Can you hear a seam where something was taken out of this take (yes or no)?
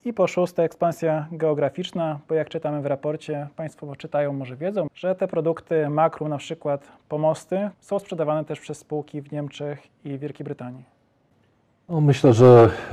yes